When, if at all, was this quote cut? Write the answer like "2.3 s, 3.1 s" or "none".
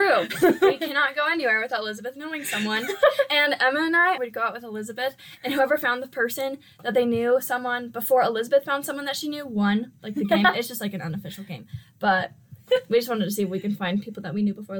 4.2 s